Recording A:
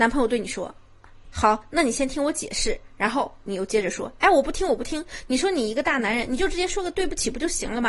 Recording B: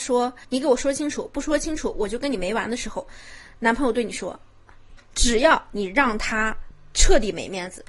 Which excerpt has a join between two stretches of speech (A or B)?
B